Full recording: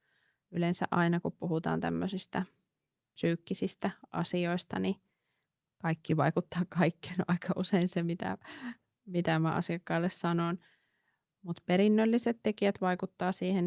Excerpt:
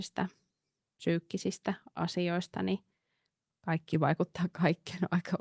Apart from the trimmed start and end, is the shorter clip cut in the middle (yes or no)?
no